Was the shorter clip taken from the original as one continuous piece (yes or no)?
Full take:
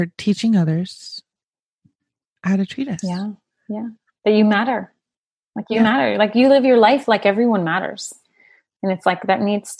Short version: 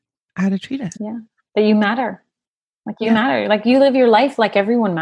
no